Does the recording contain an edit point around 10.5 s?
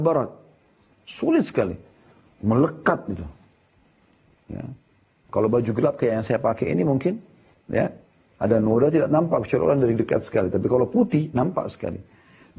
no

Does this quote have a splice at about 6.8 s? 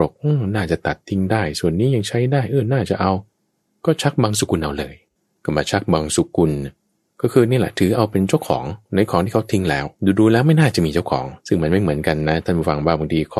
no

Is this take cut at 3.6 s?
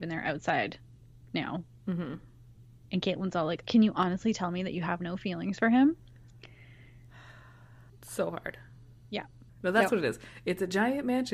yes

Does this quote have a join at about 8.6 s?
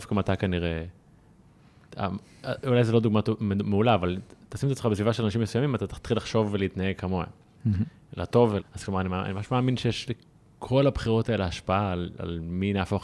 yes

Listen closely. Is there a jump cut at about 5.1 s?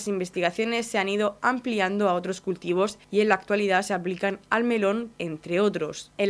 yes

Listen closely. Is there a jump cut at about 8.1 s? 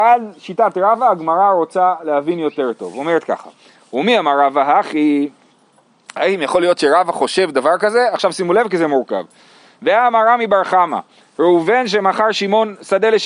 no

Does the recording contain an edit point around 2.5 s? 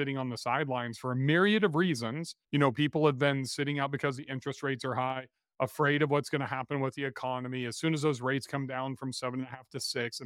no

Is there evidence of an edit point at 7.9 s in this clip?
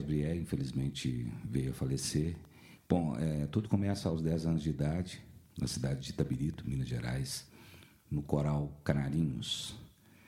no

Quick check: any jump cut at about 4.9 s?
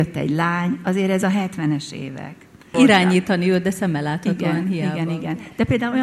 no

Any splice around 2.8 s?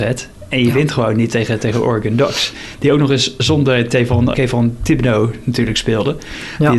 no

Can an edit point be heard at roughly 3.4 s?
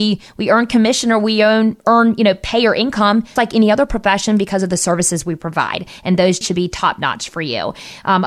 yes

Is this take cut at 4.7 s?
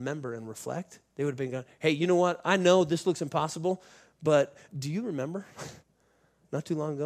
yes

